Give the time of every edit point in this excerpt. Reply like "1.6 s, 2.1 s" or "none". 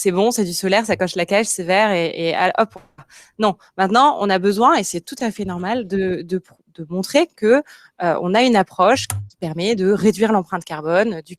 none